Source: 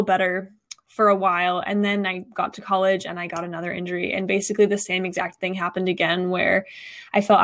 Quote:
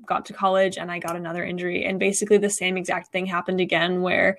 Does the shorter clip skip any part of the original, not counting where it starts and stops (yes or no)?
no